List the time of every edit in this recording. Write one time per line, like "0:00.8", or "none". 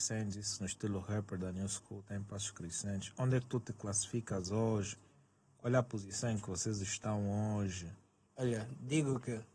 none